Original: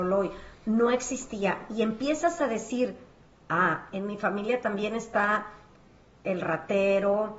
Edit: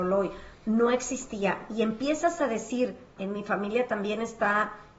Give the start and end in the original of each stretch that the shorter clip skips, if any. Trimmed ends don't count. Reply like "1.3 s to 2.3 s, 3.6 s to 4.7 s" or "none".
3.2 s to 3.9 s